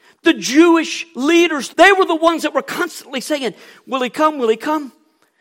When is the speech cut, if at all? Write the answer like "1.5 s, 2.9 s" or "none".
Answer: 1.7 s